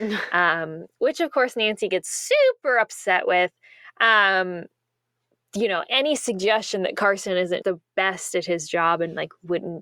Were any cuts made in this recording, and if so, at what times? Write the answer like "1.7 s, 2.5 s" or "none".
5.9 s, 7.6 s